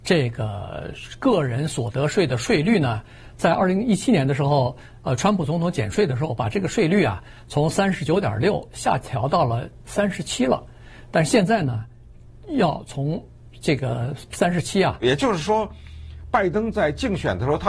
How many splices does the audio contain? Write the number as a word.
one